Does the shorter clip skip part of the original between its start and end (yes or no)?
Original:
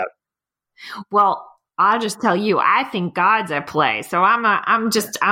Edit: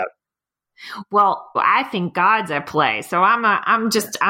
yes